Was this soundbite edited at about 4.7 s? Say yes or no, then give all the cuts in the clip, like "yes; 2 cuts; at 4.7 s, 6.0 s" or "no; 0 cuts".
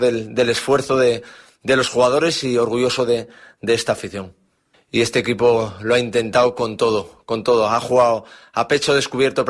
yes; 1 cut; at 4.7 s